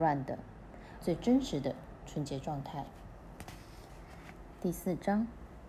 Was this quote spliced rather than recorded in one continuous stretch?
yes; 1 cut; at 1.0 s

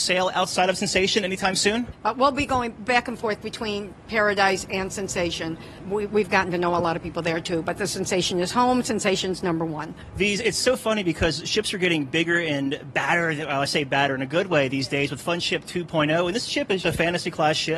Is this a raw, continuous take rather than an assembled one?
no; 1 cut; at 16.8 s

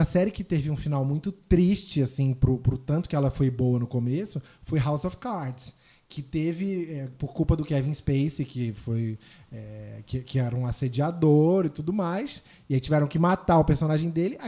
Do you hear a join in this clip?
no; 0 cuts

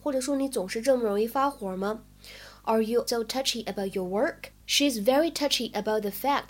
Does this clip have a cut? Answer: yes; 2 cuts; at 3.1 s, 4.6 s

